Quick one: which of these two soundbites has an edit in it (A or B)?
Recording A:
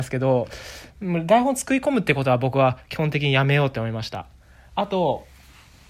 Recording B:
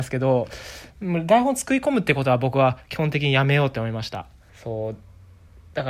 B